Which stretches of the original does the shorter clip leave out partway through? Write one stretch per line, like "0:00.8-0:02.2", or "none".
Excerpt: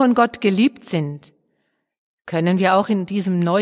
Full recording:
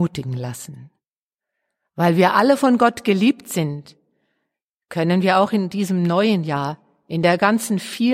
none